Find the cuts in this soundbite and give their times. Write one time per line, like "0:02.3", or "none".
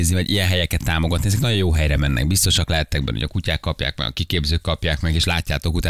none